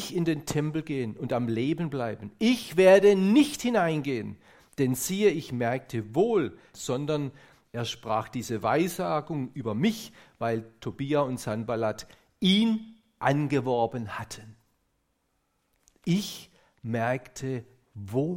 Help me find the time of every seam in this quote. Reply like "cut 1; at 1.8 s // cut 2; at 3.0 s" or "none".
cut 1; at 6.7 s